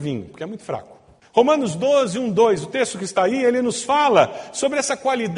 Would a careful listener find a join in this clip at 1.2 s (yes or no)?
yes